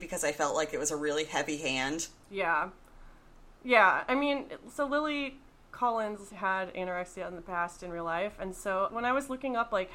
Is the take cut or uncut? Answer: cut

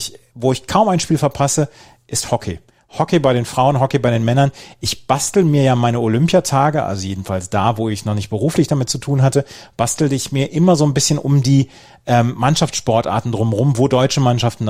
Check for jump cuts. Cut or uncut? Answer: uncut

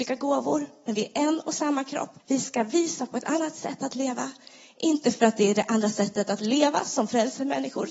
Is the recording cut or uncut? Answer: cut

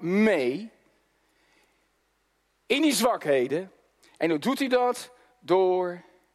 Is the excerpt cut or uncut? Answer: uncut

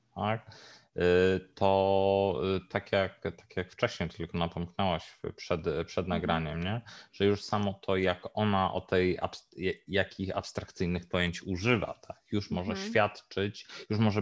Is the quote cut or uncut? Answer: uncut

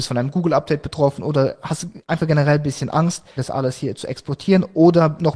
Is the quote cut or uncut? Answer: cut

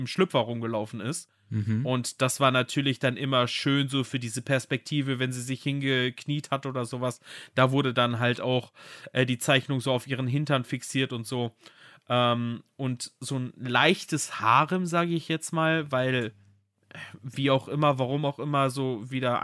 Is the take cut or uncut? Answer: uncut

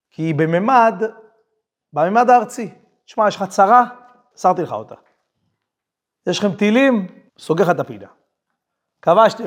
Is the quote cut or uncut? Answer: cut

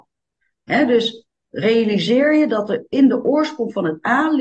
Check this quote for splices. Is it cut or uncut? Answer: uncut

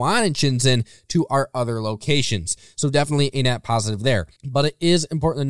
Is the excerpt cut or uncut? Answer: cut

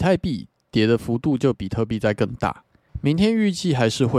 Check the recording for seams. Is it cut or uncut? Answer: cut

